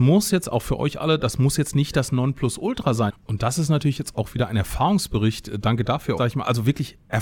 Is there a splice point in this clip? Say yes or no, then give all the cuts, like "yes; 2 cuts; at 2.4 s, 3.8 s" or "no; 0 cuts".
yes; 2 cuts; at 3.1 s, 6.2 s